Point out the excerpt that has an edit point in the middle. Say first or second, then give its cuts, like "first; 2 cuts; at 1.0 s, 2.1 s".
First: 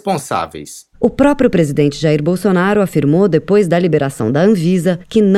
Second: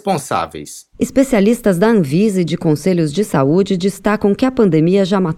first; 1 cut; at 0.9 s